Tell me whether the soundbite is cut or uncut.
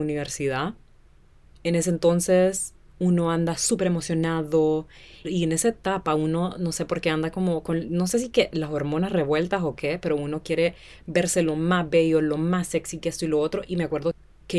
cut